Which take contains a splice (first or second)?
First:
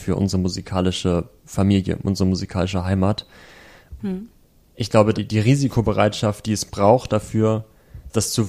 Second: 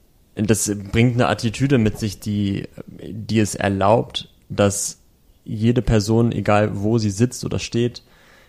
first